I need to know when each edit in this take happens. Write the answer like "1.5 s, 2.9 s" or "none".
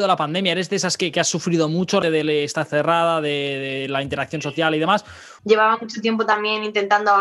2.0 s, 5.4 s